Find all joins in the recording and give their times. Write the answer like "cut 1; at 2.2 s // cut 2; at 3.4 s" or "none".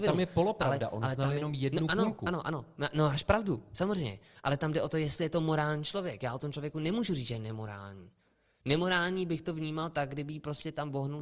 none